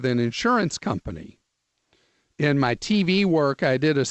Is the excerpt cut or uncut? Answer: uncut